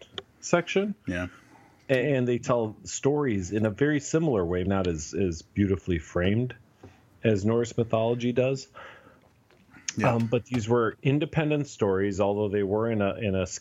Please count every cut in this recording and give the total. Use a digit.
1